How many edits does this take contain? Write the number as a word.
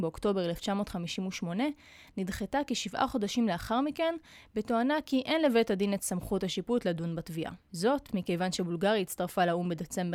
zero